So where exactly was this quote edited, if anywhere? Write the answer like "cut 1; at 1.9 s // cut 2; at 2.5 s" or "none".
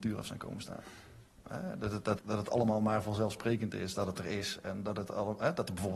cut 1; at 2.2 s

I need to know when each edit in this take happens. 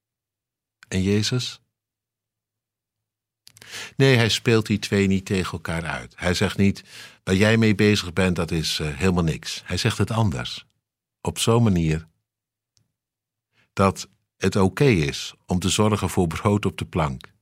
none

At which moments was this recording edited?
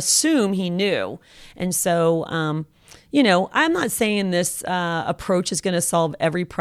none

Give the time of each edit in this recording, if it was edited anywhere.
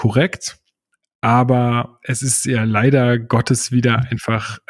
none

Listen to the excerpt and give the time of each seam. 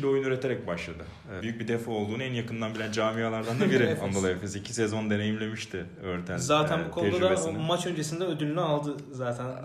cut 1; at 1.4 s

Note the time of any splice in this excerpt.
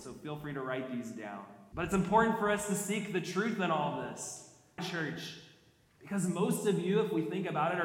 cut 1; at 1.7 s // cut 2; at 4.8 s

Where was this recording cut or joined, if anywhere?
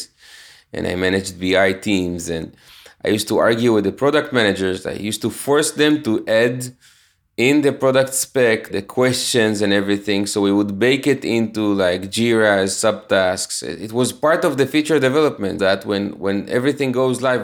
cut 1; at 8.7 s // cut 2; at 15.6 s

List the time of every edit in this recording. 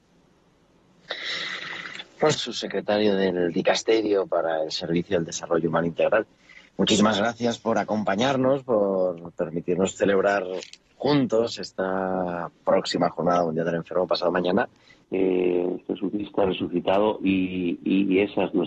cut 1; at 2.3 s // cut 2; at 15.0 s

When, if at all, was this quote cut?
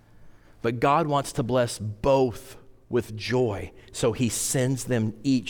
none

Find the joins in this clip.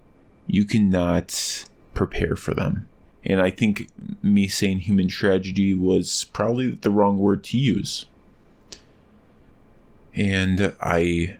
cut 1; at 3.1 s

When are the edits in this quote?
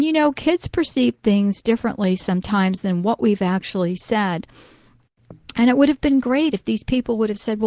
none

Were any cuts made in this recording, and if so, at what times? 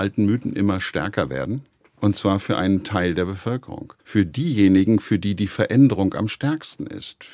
cut 1; at 4.0 s

